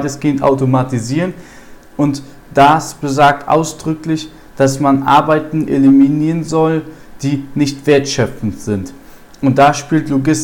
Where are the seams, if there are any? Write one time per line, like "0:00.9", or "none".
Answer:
0:01.8

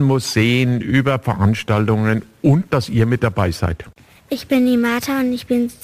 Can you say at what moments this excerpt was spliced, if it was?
none

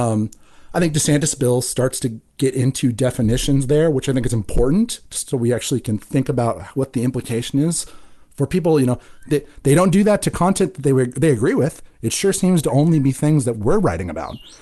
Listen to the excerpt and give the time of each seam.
none

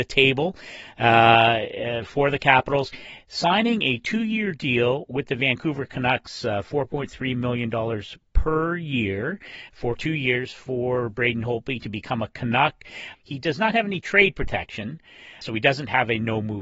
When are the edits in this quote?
0:13.1
0:15.4

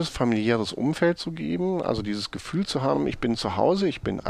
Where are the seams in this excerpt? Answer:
none

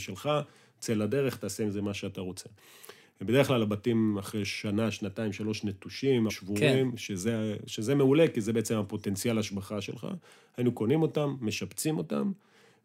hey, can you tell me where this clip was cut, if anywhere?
0:06.3

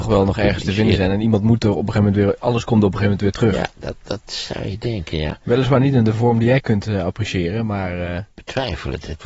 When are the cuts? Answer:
none

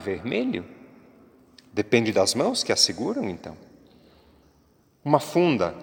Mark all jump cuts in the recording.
none

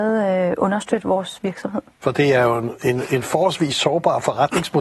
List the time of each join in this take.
0:02.0

